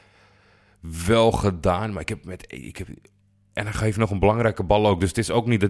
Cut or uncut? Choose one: uncut